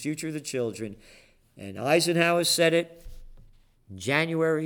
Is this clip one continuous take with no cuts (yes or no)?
yes